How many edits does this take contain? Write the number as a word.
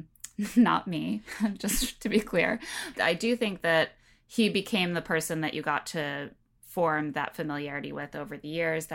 one